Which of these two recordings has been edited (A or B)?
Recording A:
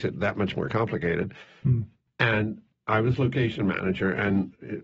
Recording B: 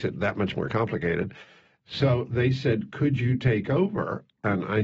A